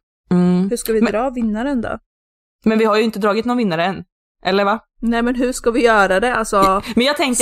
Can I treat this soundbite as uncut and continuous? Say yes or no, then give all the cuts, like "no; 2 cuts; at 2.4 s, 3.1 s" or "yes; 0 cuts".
yes; 0 cuts